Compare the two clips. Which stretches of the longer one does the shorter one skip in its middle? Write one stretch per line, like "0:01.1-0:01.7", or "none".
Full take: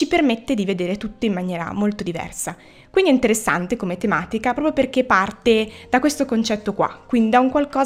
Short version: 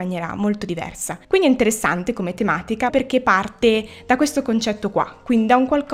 0:02.6-0:02.9
0:04.5-0:04.7